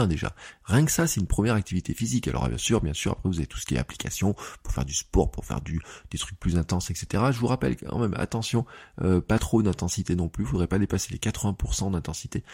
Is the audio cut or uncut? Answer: uncut